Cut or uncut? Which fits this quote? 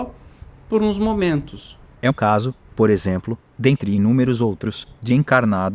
cut